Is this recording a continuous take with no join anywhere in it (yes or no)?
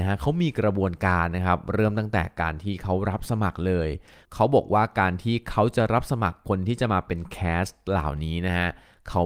yes